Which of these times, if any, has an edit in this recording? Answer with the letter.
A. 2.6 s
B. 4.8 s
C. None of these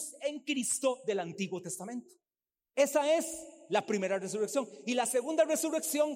C